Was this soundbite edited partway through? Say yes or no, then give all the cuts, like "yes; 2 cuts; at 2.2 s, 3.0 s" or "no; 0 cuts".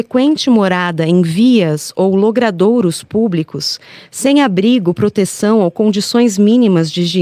no; 0 cuts